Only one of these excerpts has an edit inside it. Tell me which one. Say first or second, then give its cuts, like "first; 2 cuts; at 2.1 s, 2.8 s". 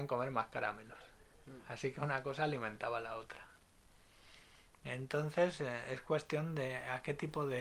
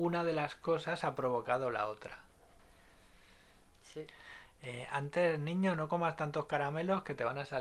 second; 1 cut; at 3.7 s